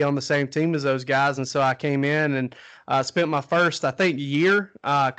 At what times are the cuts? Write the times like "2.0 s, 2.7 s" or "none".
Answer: none